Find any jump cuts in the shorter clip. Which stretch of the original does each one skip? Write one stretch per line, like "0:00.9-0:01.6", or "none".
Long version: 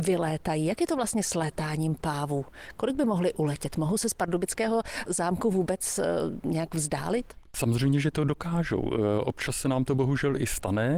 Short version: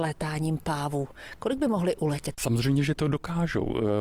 0:03.7-0:07.5